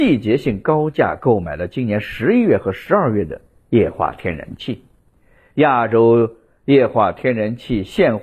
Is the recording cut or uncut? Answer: uncut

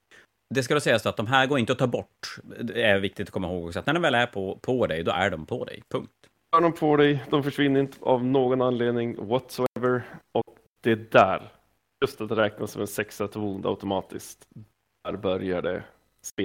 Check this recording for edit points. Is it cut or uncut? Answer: cut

